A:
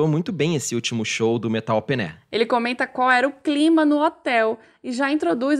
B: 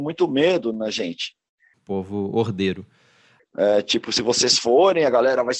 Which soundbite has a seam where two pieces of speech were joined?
B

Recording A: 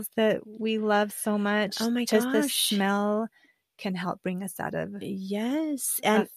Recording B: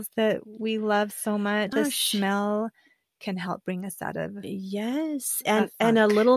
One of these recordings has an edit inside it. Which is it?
B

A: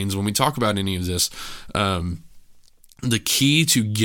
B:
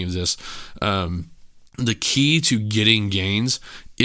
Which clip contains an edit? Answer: B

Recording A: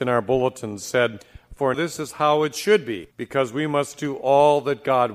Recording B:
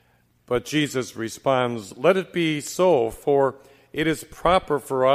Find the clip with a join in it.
A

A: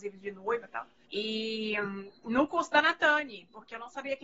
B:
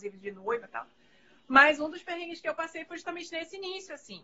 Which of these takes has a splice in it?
A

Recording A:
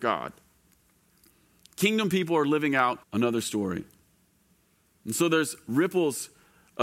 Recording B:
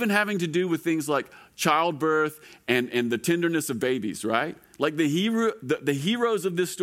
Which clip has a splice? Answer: A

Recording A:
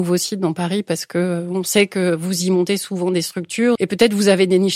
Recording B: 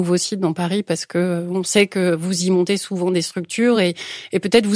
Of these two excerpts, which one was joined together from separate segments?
A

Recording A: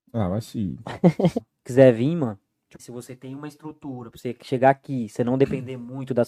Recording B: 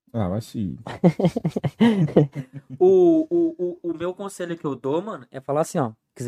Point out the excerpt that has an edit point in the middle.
A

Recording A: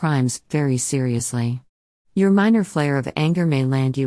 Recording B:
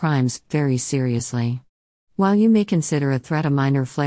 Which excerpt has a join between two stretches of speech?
A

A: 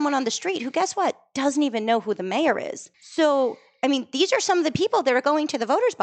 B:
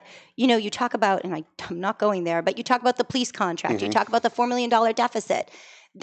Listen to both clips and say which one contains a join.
A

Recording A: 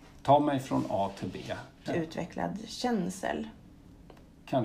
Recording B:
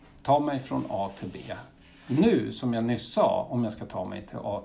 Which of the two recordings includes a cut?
A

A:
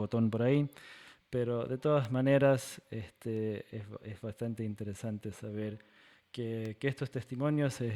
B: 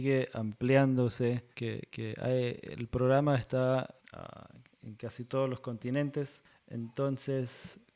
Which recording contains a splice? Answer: B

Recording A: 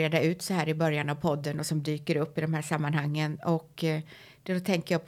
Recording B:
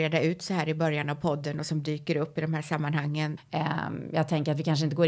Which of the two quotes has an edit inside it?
B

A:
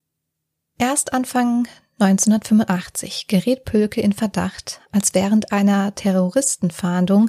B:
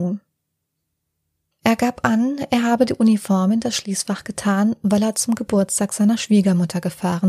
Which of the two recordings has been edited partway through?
B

